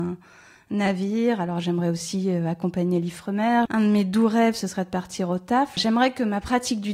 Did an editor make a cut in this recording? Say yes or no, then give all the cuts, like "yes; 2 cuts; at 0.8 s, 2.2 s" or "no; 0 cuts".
yes; 2 cuts; at 3.7 s, 5.8 s